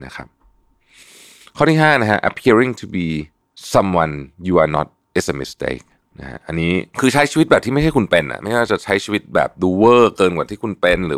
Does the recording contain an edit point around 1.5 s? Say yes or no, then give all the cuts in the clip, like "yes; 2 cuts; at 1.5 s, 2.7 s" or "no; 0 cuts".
no; 0 cuts